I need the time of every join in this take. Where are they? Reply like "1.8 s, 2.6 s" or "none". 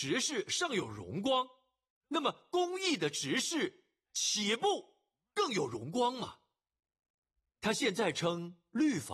none